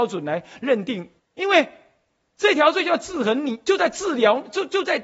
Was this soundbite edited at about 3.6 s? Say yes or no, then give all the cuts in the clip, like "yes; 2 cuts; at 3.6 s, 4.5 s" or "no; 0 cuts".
no; 1 cut; at 1.2 s